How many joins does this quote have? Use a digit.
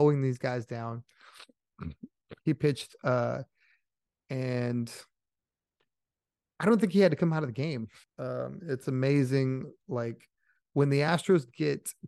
3